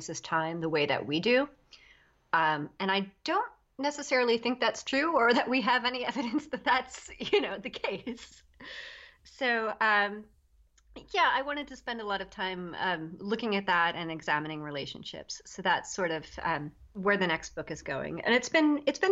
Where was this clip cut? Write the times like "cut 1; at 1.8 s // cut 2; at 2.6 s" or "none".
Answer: none